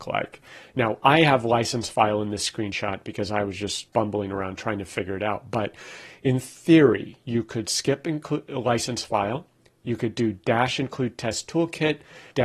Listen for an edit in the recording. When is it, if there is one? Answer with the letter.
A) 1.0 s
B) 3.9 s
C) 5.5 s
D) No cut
B